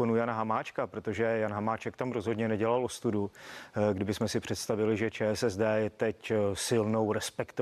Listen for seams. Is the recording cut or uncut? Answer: uncut